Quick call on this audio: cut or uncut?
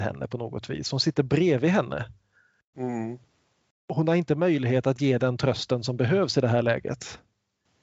uncut